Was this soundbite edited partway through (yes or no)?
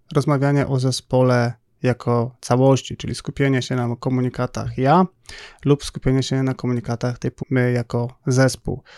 yes